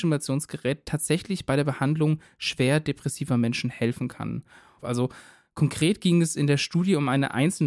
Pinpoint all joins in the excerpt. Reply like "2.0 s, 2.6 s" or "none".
4.8 s

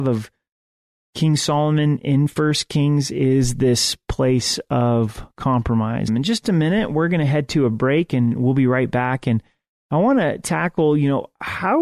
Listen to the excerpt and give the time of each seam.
6.1 s

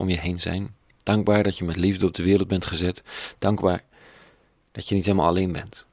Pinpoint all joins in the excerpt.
none

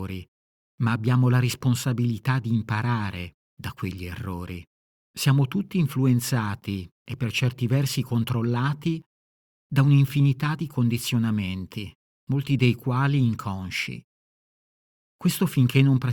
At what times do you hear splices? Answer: 5.1 s

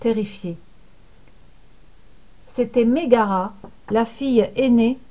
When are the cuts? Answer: 2.4 s

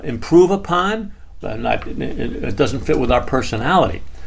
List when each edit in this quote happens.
1.4 s

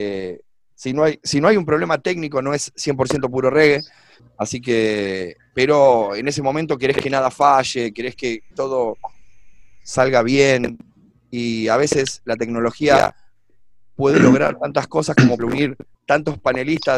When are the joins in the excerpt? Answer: 4.3 s, 15.4 s

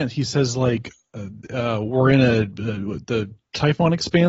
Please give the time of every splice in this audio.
none

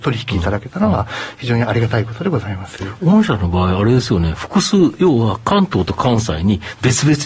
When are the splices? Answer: none

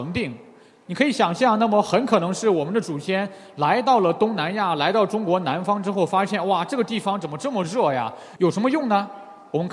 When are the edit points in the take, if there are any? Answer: 8.4 s

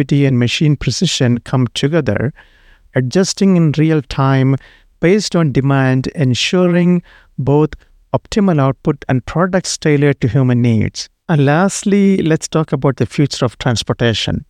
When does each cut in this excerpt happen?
none

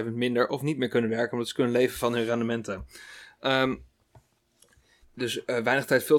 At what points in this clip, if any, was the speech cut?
5.0 s

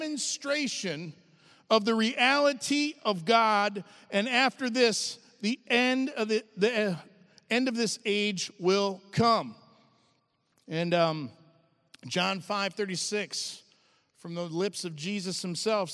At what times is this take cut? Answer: none

